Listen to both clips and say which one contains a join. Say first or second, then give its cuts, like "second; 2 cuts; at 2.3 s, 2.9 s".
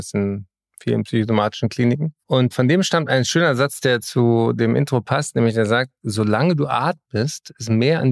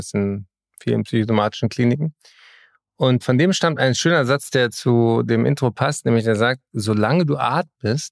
first; 1 cut; at 2.2 s